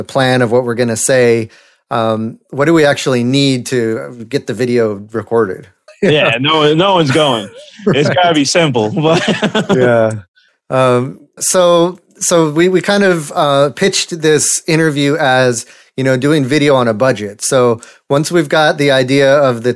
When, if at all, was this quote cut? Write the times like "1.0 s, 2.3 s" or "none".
5.9 s, 11.4 s